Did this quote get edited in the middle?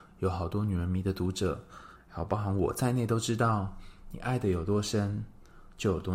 no; 0 cuts

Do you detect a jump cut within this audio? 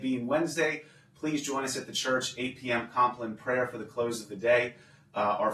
no; 0 cuts

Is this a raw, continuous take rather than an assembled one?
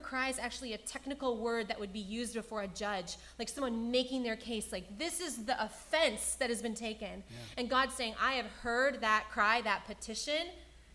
yes; 0 cuts

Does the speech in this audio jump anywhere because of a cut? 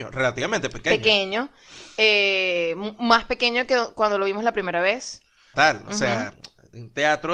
yes; 1 cut; at 5.5 s

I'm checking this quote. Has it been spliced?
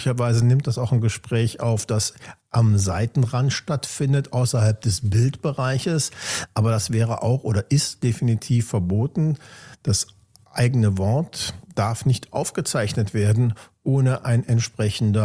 no; 0 cuts

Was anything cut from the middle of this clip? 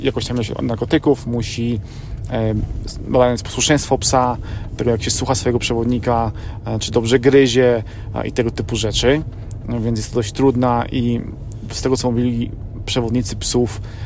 no; 0 cuts

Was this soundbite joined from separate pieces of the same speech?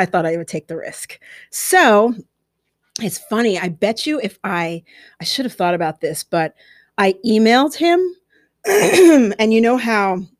no; 0 cuts

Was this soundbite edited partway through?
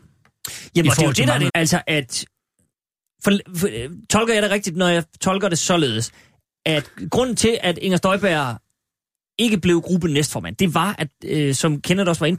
yes; 1 cut; at 1.5 s

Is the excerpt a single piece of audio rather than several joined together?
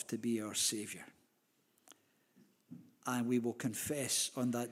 yes; 0 cuts

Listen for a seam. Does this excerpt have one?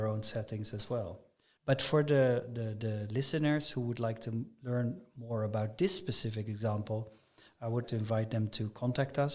yes; 2 cuts; at 1.6 s, 7.8 s

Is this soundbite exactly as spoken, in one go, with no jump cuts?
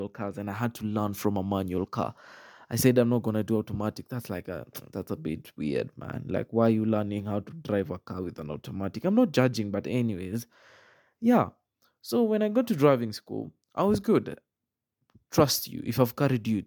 yes; 0 cuts

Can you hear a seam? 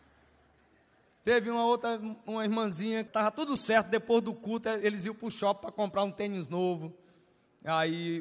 yes; 1 cut; at 3.1 s

